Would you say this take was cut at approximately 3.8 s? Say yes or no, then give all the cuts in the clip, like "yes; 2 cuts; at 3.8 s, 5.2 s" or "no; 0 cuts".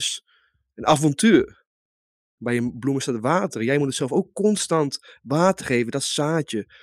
no; 1 cut; at 2.4 s